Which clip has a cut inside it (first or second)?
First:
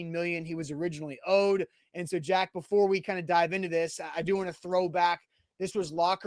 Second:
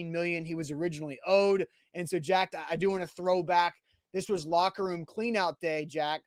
second